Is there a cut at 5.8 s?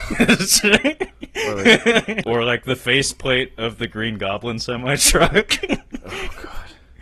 no; 1 cut; at 2.2 s

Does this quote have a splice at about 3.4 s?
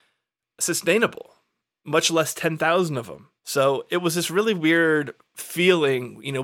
yes; 1 cut; at 3.4 s

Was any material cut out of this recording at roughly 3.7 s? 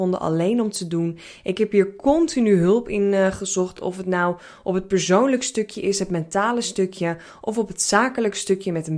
no; 0 cuts

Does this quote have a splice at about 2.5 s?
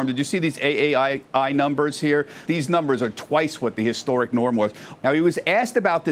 yes; 2 cuts; at 2.5 s, 5.0 s

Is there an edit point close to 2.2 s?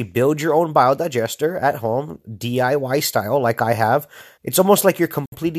no; 1 cut; at 4.4 s

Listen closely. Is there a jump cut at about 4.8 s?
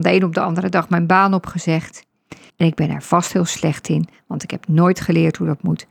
no; 1 cut; at 2.5 s

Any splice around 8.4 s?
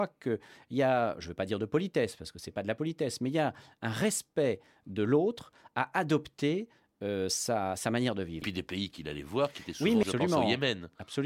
yes; 2 cuts; at 8.4 s, 10.0 s

